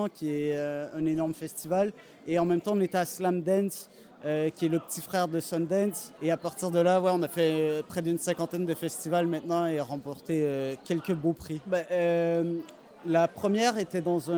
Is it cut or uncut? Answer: cut